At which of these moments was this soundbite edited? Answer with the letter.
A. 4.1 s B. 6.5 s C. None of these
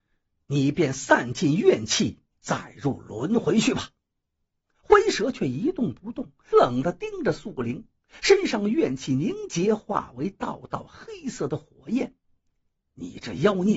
B